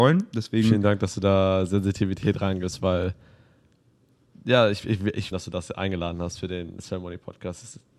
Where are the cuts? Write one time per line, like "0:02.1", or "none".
0:05.3